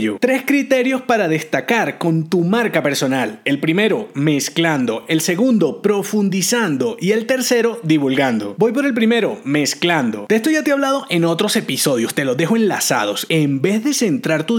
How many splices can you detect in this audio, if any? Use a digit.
0